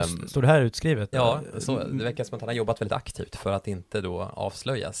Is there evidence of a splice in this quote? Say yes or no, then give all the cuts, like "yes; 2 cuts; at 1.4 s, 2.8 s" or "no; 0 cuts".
yes; 1 cut; at 1.1 s